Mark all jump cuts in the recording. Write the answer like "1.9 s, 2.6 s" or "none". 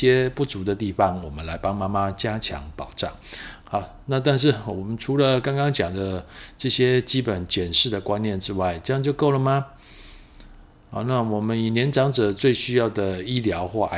3.6 s